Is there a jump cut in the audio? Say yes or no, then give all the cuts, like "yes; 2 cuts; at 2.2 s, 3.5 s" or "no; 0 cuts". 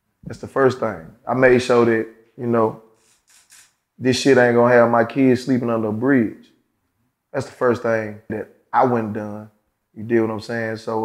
yes; 2 cuts; at 8.3 s, 9.8 s